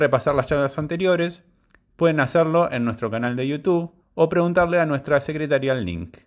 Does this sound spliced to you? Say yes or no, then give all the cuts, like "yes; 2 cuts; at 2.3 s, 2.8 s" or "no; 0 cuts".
yes; 1 cut; at 4.0 s